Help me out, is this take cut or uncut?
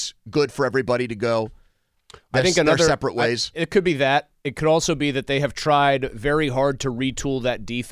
uncut